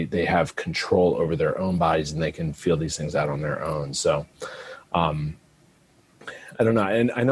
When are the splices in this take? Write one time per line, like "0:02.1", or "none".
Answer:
none